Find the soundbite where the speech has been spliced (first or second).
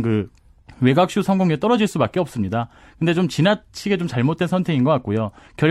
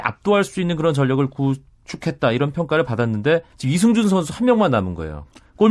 second